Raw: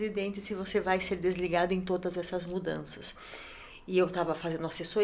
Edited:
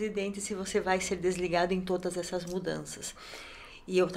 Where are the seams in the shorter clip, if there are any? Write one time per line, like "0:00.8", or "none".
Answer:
none